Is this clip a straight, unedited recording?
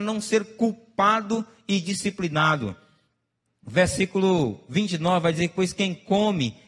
yes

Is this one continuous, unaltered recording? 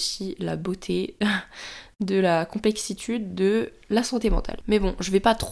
yes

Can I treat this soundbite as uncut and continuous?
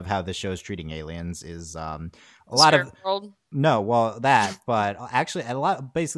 yes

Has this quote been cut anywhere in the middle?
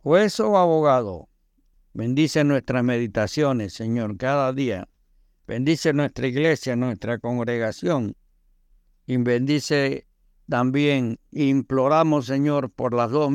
yes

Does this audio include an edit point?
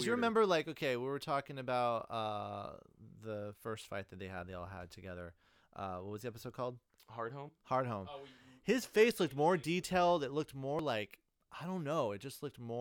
no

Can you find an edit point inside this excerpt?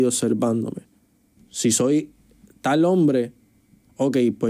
yes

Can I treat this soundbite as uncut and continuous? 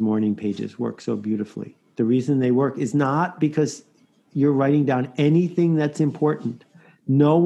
yes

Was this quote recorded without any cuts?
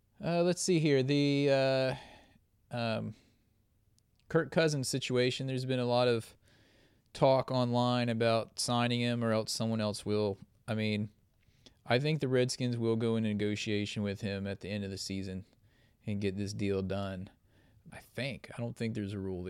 no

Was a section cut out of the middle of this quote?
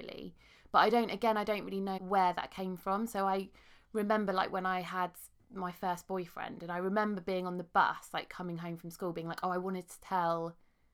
yes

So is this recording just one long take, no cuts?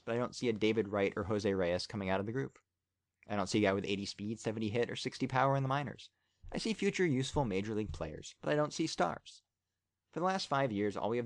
yes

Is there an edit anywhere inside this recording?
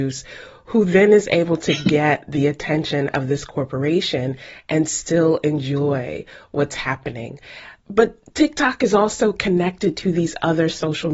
yes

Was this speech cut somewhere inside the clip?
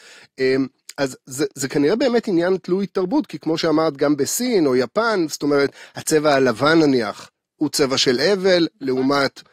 no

